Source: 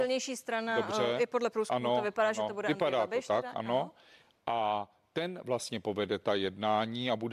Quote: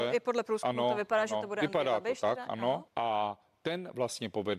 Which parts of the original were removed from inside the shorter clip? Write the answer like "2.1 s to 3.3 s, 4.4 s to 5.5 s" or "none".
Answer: 3.9 s to 4.4 s